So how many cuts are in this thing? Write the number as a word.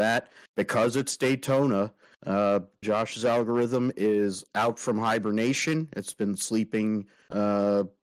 one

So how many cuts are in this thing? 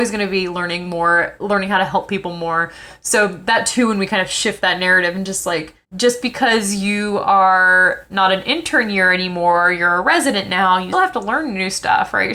two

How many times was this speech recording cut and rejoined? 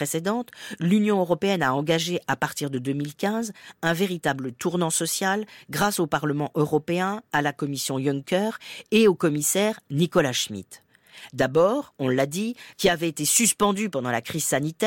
two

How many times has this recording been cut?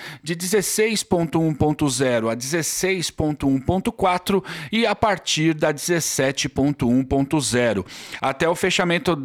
one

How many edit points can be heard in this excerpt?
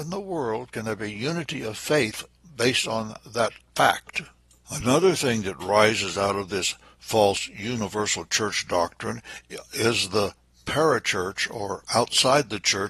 zero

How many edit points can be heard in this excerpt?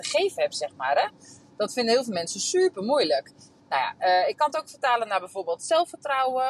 zero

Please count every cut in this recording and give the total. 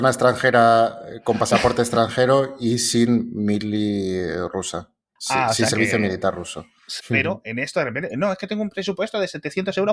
one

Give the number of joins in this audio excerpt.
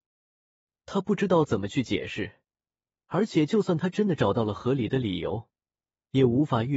zero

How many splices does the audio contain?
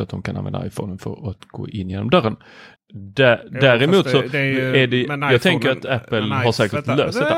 one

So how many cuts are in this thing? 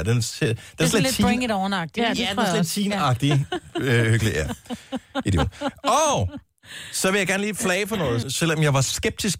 one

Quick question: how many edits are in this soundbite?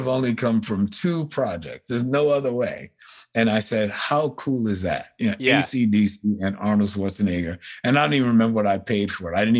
zero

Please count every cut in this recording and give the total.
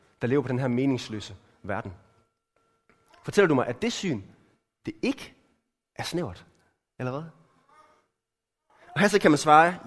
zero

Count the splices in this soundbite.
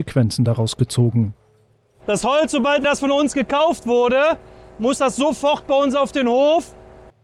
zero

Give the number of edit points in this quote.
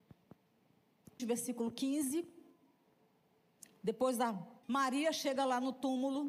two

